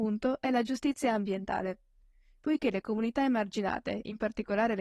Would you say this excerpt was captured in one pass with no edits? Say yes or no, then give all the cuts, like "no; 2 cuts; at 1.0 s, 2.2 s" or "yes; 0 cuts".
yes; 0 cuts